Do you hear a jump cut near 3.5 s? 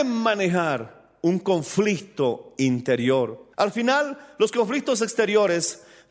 yes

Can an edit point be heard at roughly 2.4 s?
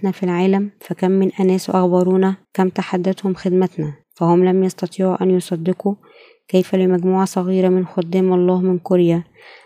yes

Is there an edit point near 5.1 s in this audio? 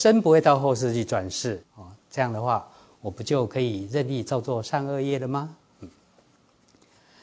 no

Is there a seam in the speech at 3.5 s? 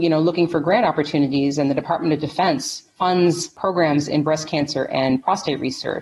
no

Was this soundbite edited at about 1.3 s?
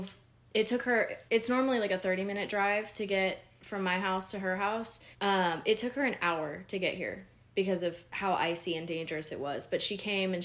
yes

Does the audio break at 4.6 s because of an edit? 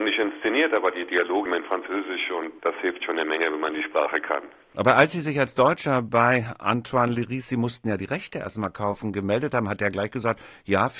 no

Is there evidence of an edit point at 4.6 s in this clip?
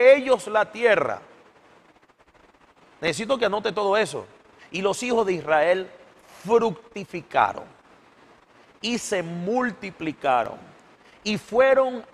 yes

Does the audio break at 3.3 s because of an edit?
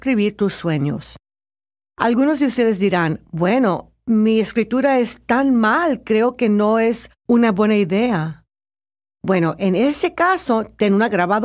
no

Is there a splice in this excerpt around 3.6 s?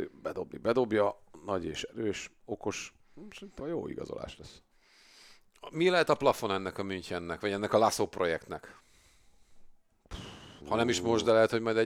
yes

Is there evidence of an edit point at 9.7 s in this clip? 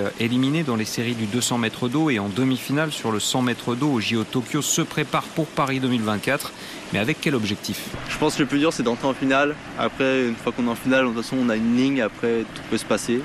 no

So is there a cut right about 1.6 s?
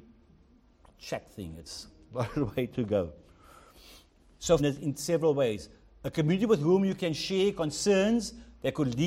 no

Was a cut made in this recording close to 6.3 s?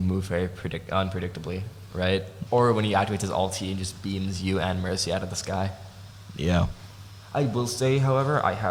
no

